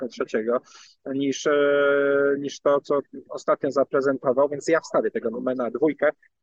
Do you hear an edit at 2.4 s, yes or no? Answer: no